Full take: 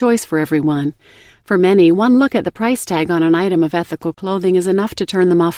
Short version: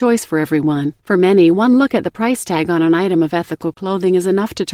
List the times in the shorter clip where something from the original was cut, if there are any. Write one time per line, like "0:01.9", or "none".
0:01.0